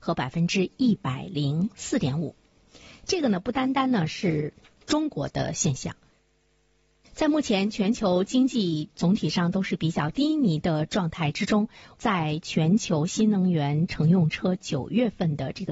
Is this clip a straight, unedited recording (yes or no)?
yes